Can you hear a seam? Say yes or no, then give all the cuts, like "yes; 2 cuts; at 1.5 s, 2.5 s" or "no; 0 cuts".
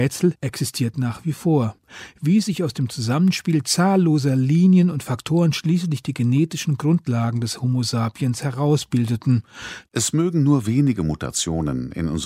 yes; 1 cut; at 9.9 s